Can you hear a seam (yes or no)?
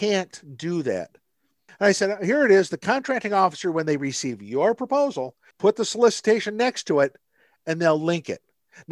yes